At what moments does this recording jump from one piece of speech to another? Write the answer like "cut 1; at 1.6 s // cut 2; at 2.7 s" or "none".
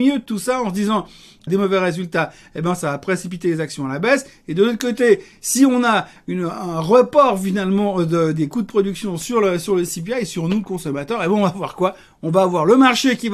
cut 1; at 1.5 s